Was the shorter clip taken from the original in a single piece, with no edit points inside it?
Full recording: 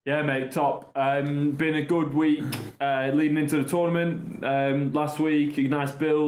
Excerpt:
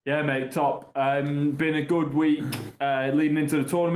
yes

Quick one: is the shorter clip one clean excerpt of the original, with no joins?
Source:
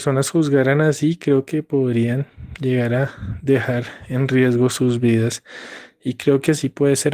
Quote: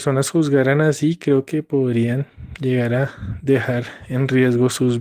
yes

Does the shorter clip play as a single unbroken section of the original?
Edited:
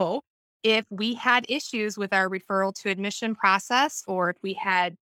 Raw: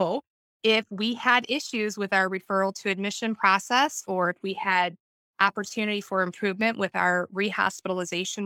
yes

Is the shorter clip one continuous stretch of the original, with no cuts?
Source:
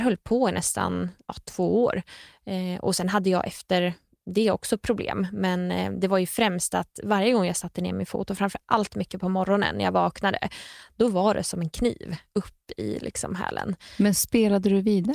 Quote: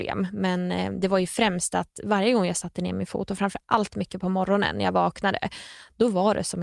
yes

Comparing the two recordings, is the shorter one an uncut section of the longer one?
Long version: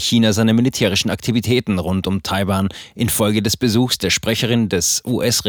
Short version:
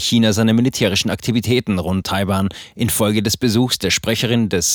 no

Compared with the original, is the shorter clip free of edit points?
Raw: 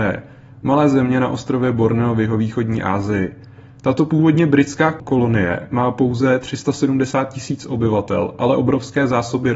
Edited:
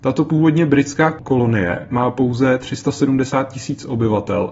yes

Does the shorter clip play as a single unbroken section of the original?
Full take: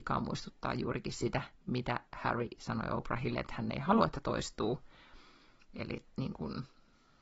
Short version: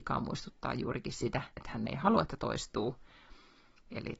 no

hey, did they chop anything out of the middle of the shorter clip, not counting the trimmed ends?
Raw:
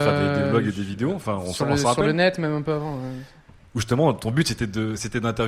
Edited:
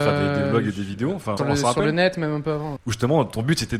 yes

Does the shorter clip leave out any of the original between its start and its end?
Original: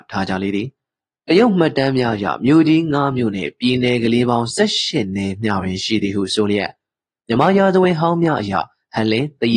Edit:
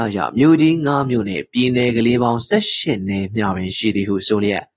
no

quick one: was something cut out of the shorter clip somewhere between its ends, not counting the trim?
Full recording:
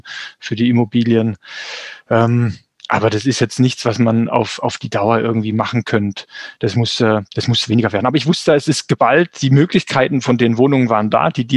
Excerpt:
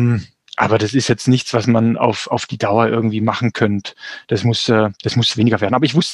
no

